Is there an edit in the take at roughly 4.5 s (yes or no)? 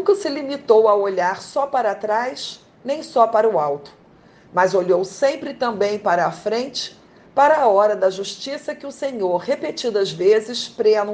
no